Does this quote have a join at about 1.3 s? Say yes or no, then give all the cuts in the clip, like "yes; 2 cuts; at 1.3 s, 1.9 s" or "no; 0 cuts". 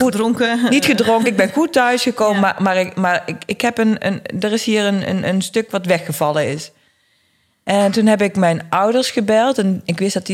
no; 0 cuts